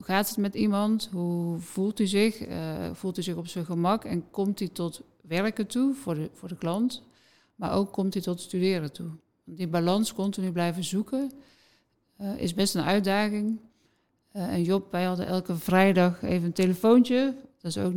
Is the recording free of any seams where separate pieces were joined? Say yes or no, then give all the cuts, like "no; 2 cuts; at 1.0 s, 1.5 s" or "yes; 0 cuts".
yes; 0 cuts